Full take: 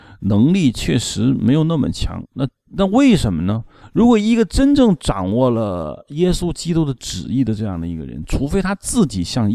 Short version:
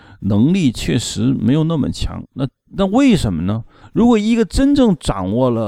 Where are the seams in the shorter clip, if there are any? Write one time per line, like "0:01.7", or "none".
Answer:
none